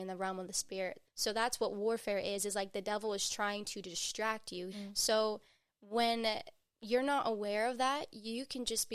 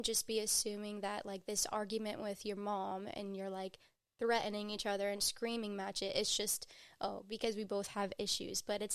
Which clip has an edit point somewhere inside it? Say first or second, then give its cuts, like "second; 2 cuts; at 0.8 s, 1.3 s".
first; 2 cuts; at 1.0 s, 4.7 s